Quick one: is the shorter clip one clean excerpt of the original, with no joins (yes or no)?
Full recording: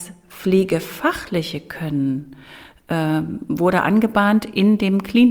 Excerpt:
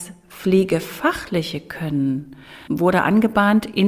no